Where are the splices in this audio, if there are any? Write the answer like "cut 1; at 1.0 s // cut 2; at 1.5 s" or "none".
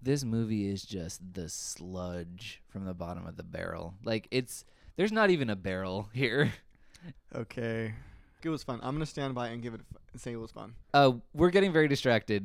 cut 1; at 7.1 s // cut 2; at 8.4 s // cut 3; at 10.9 s